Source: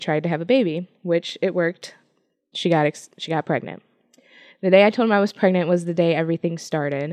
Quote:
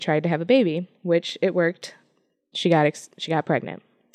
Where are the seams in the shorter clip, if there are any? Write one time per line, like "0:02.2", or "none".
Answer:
none